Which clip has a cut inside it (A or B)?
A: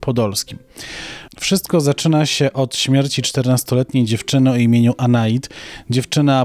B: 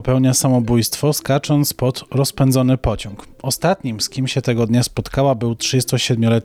A